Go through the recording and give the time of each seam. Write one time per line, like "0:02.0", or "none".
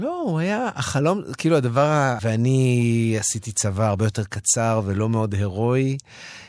0:02.2

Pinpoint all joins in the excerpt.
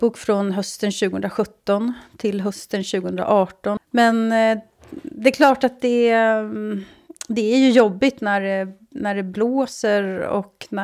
0:03.8

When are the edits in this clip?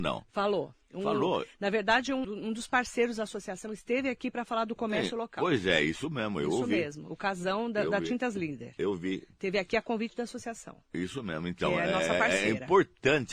0:02.2

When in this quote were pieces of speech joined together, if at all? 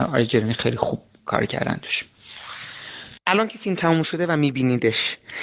0:03.2

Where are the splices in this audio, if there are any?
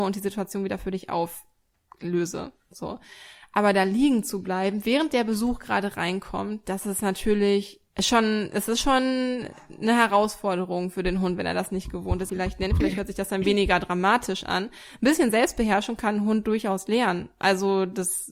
0:07.9
0:12.3

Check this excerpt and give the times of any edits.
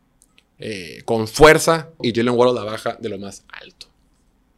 0:02.0

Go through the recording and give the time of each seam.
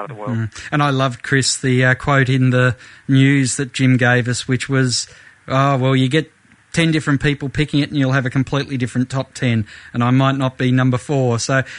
none

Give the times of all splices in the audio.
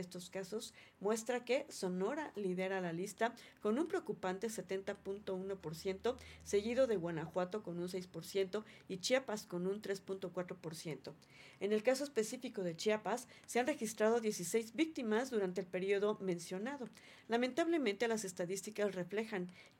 none

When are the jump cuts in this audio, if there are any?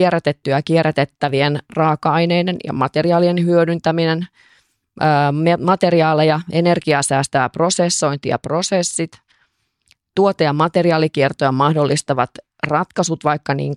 none

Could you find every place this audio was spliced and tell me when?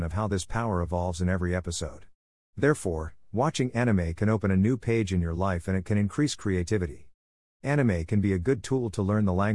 0:07.5

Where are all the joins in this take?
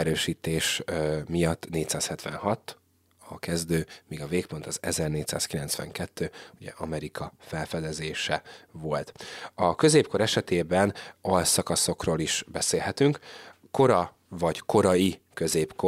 none

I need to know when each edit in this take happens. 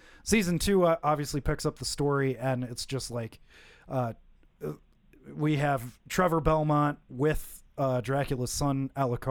none

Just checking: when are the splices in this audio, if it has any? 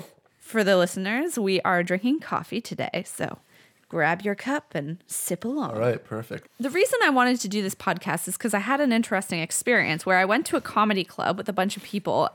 0:06.4

